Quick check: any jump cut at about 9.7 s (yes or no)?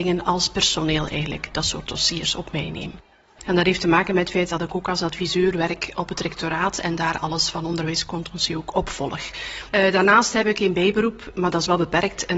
no